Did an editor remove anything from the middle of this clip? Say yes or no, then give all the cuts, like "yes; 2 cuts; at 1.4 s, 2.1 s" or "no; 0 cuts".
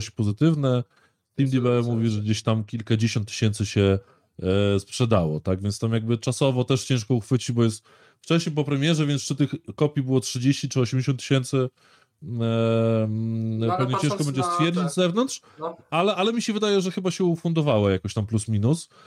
no; 0 cuts